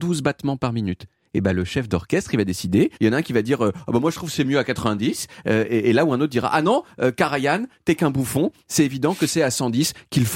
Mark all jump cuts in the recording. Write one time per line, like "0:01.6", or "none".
0:03.0